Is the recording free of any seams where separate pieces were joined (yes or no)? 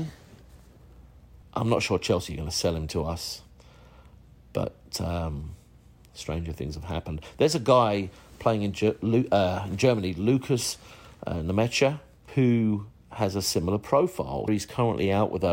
no